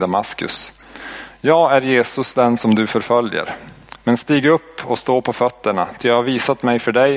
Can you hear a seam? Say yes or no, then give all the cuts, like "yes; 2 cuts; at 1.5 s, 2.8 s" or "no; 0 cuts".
no; 0 cuts